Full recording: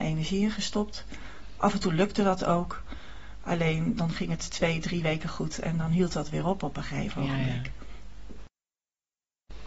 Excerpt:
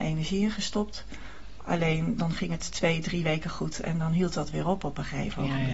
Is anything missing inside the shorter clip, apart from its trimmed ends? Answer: yes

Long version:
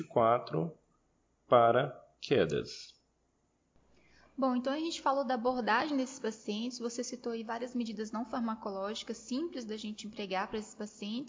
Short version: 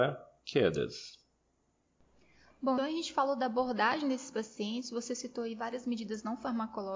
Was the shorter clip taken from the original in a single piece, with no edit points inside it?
no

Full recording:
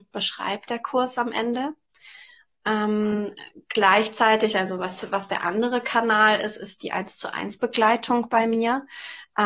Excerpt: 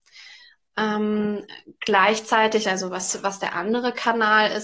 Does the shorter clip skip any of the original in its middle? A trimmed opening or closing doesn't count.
no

